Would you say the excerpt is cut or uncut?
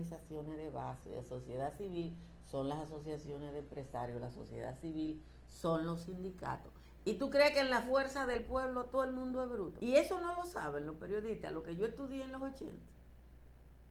cut